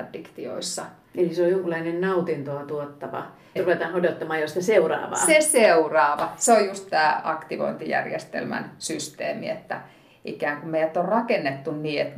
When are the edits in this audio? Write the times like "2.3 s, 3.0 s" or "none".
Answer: 3.6 s

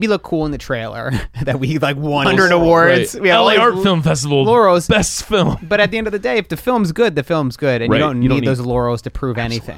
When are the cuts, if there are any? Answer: 2.2 s

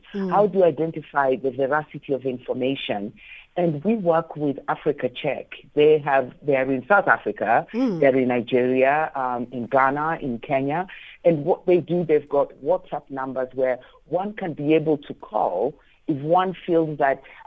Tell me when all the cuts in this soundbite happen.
none

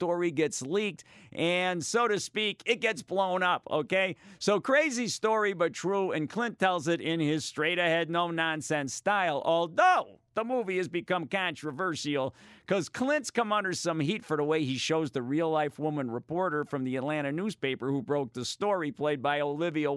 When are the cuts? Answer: 10.3 s

